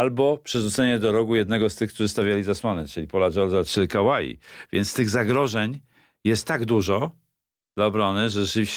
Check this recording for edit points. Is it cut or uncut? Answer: cut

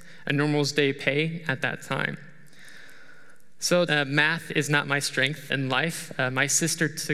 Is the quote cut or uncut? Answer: cut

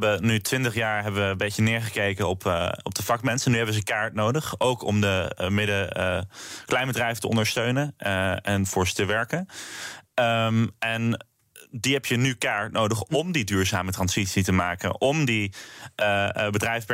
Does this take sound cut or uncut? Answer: uncut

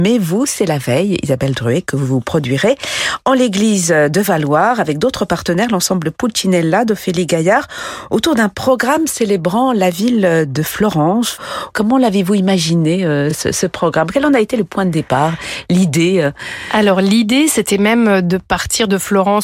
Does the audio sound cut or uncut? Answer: uncut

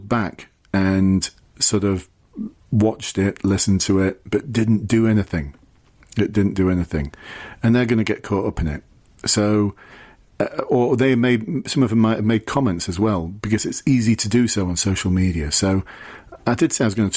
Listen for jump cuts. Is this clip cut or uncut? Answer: uncut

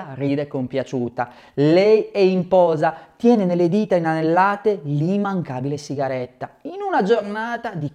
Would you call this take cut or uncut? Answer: uncut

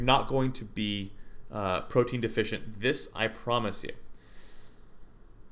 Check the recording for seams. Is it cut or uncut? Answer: uncut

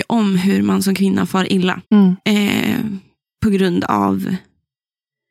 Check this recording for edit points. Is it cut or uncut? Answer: cut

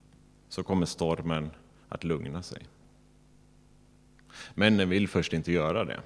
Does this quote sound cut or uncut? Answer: uncut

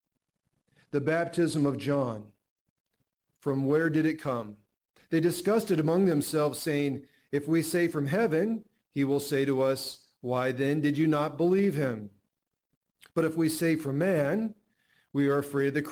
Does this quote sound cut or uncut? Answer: cut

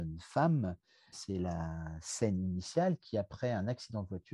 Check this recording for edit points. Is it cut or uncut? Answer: cut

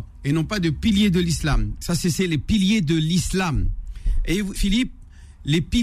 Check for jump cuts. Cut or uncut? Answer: cut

